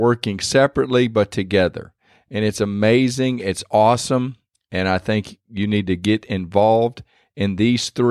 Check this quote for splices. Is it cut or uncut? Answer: uncut